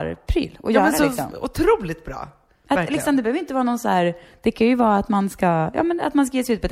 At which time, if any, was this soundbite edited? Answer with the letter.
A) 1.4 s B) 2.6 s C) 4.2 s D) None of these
D